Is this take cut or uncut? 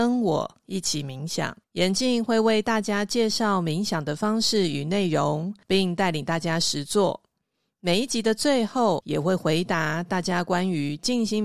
cut